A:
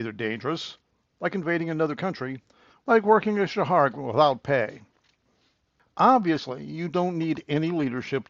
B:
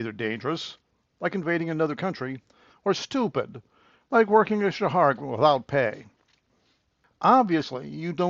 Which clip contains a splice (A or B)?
A